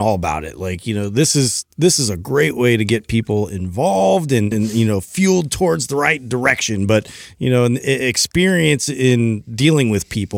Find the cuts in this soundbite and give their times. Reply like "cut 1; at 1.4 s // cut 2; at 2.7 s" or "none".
cut 1; at 4.5 s

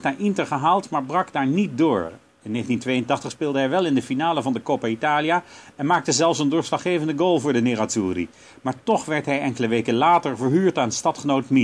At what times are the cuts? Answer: none

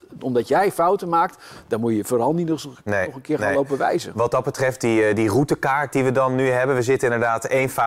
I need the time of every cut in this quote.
none

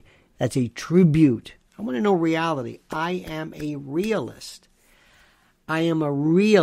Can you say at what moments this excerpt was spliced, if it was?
none

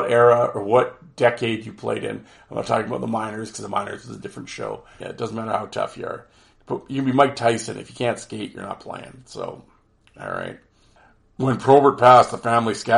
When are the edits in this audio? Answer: cut 1; at 5.0 s

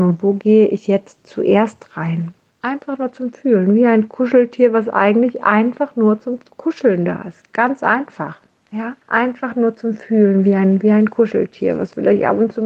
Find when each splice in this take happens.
cut 1; at 2.5 s // cut 2; at 9.0 s

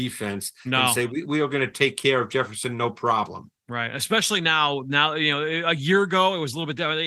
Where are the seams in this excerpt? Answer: none

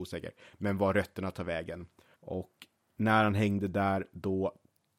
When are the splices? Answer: cut 1; at 2.1 s

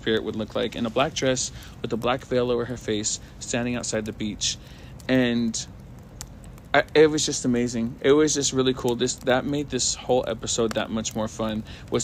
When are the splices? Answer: none

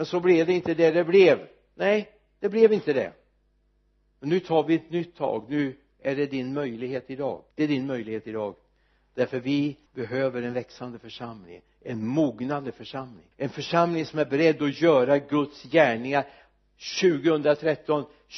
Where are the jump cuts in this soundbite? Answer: cut 1; at 7.5 s // cut 2; at 9.9 s // cut 3; at 13.3 s

